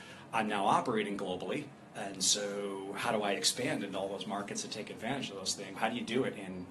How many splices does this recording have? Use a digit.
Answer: 2